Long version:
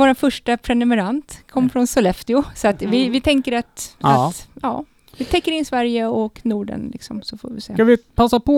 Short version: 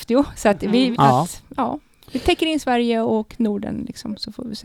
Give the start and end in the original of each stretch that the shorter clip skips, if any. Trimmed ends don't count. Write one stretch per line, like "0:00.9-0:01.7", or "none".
0:03.1-0:04.0